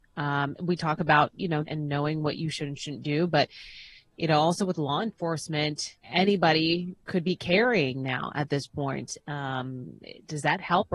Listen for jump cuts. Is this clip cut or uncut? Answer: cut